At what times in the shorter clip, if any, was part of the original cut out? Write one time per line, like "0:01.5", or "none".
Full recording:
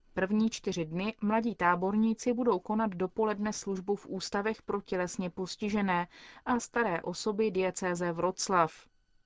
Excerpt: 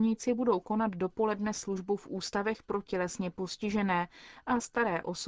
none